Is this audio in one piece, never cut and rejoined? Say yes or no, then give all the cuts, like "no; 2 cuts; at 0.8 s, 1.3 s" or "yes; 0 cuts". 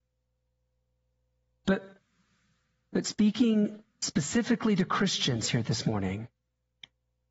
yes; 0 cuts